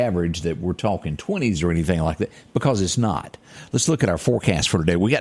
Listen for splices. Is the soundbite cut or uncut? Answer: uncut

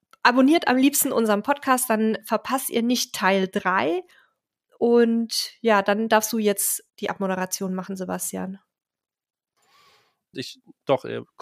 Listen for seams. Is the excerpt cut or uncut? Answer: cut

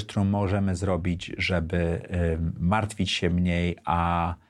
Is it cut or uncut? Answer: uncut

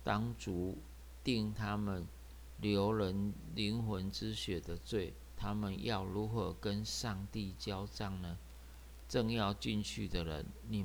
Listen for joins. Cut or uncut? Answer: cut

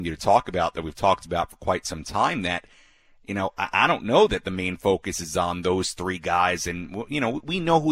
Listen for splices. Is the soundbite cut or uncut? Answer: uncut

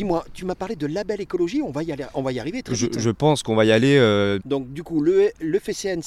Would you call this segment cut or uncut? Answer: cut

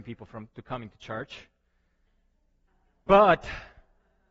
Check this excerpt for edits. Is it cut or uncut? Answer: uncut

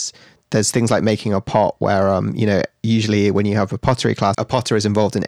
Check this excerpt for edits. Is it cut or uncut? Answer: cut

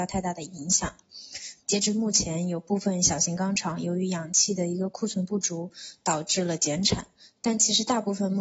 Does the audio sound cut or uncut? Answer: cut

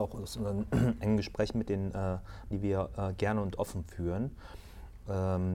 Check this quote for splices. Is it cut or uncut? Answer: cut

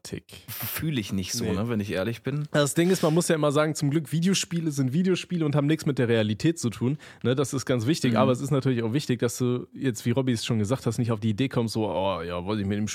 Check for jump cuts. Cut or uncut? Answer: uncut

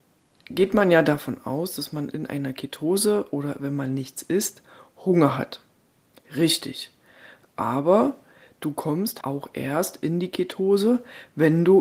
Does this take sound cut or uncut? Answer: cut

